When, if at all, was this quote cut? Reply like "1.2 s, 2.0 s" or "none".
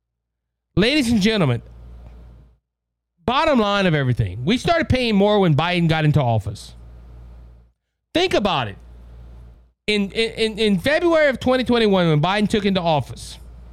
none